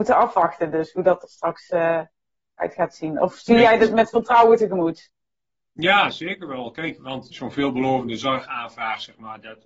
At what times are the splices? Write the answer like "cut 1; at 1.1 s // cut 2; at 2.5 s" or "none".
cut 1; at 7.3 s